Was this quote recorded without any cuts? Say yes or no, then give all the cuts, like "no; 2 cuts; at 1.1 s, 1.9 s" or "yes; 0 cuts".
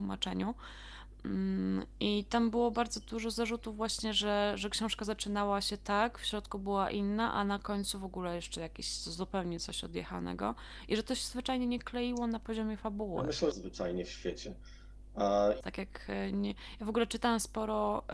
no; 2 cuts; at 13.5 s, 15.6 s